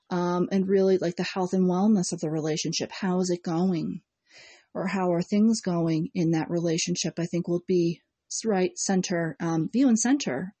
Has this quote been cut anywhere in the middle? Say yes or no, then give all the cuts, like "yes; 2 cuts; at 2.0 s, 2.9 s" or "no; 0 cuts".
no; 0 cuts